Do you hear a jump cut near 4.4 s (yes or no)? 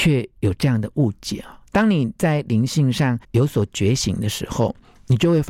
no